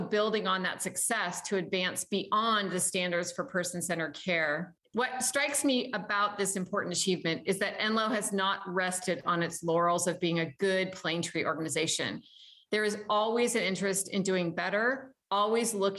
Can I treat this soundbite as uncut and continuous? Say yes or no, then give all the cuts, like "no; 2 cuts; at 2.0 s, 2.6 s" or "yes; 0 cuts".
yes; 0 cuts